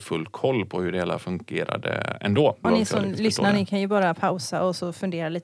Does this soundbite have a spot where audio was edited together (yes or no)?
yes